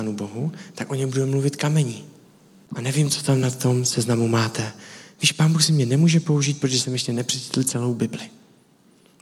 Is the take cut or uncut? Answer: cut